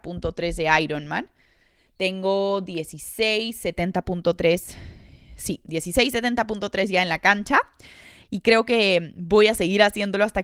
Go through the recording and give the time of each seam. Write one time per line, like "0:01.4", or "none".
none